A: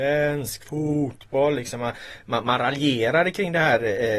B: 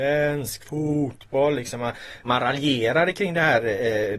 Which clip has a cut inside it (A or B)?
B